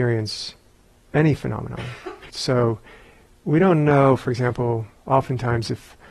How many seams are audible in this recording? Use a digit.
1